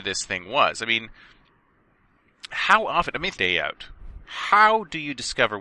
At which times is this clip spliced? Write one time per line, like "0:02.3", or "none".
0:03.3